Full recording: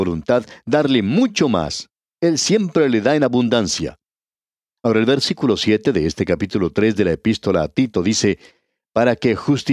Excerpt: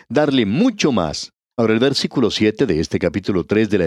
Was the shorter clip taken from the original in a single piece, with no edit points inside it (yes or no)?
no